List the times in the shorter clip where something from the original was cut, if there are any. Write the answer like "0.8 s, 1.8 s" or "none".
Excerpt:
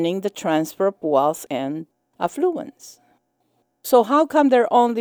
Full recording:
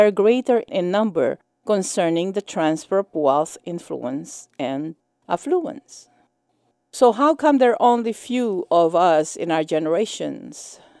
1.5 s